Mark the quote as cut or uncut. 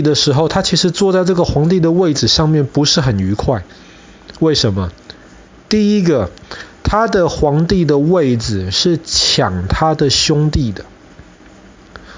uncut